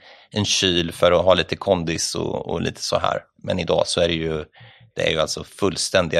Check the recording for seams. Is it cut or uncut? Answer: uncut